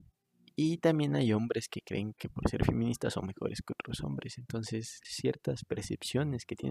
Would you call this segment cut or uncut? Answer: cut